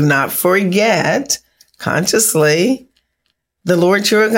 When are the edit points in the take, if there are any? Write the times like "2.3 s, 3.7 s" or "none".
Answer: none